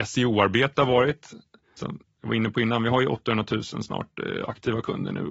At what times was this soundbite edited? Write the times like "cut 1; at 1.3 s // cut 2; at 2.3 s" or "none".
cut 1; at 1.8 s